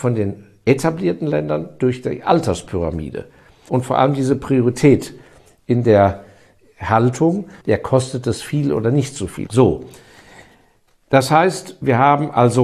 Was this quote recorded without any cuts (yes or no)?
no